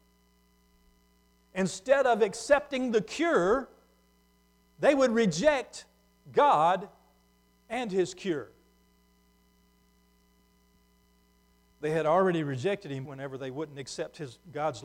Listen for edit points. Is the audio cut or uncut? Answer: cut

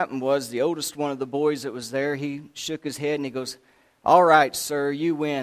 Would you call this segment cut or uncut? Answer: uncut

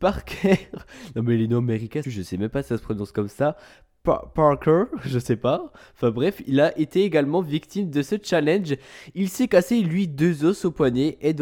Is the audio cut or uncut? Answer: cut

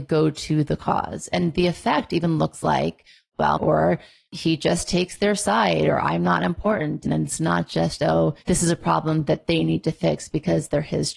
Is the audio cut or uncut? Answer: cut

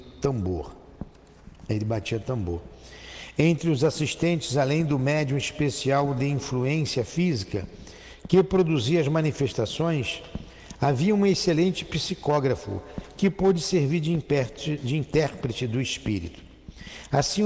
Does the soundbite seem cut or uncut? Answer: uncut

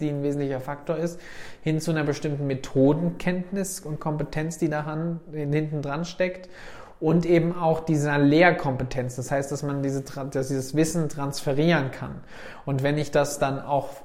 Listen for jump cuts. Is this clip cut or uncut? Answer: uncut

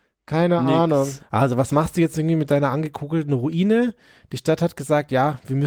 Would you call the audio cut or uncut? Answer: cut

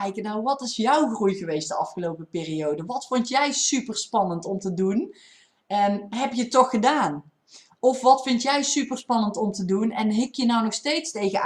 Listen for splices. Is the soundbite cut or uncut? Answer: uncut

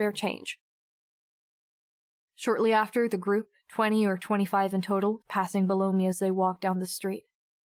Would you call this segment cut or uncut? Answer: cut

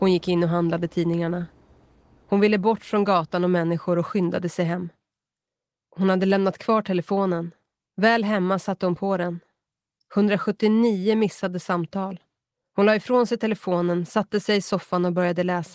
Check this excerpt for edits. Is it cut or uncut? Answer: uncut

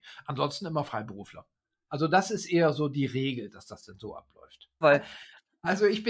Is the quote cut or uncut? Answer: cut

